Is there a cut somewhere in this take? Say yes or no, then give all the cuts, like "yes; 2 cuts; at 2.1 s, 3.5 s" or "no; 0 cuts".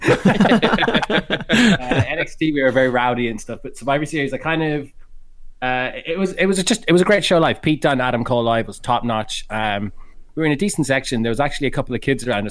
no; 0 cuts